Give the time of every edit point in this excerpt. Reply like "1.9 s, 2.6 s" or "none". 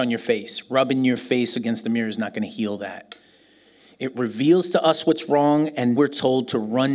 6.0 s